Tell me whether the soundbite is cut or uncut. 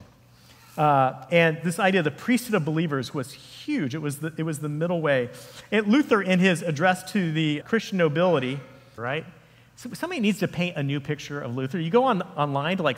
cut